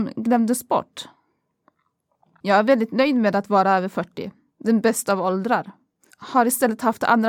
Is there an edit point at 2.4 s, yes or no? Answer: no